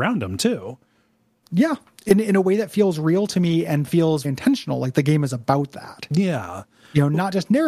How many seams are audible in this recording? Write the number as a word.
one